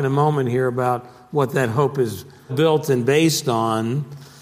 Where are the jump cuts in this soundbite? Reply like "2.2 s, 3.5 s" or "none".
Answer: 2.5 s